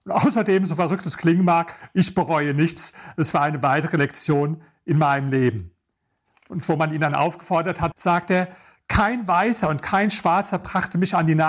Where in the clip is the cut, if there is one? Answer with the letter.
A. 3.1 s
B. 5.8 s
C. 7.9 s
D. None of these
C